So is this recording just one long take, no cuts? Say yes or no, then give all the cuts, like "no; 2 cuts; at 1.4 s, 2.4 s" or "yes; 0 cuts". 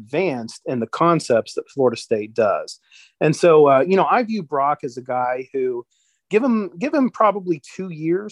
yes; 0 cuts